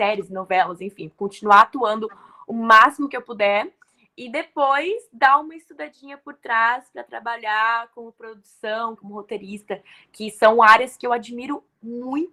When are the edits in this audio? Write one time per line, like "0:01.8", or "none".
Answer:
0:09.0